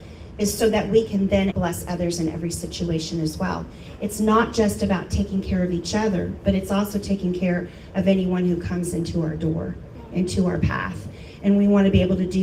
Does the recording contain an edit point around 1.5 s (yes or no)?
yes